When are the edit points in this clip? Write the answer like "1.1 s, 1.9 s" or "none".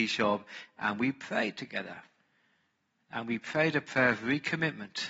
none

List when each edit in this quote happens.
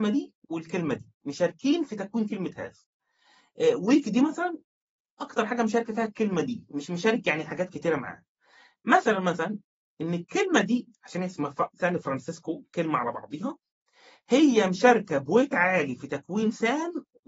none

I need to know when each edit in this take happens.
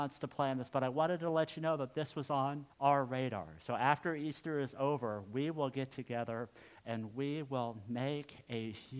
2.7 s

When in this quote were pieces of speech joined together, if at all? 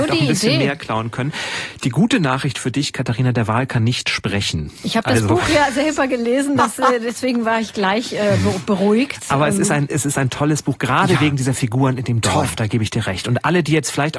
none

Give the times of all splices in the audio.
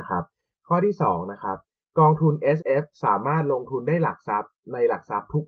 2.6 s

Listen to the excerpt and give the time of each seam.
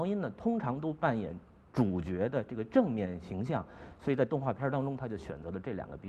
none

